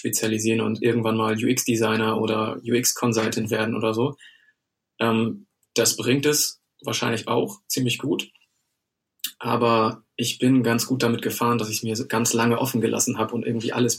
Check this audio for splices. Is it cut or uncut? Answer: uncut